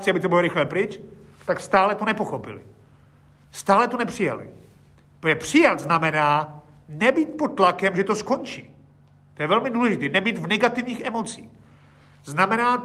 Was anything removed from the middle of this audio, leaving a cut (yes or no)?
no